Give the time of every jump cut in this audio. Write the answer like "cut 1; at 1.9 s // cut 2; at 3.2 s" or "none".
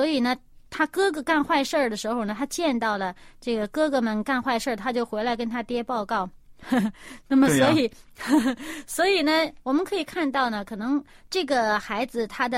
none